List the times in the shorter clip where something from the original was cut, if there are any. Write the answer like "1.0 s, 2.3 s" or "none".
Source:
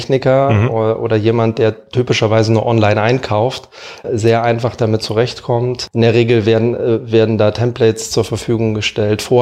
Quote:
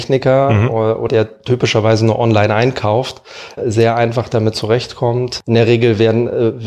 1.1 s